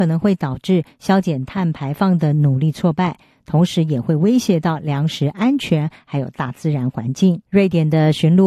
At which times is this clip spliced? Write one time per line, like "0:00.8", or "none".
0:07.5